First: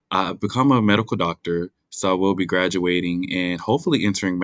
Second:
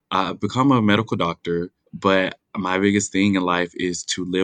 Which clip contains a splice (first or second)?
second